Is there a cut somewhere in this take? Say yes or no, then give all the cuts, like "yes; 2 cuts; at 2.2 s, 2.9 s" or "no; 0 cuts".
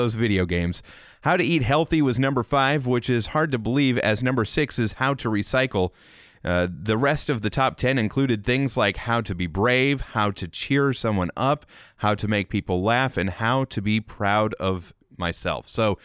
no; 0 cuts